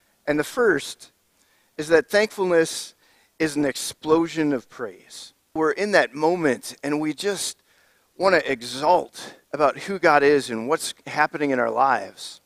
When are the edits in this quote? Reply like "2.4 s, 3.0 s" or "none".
5.6 s, 9.4 s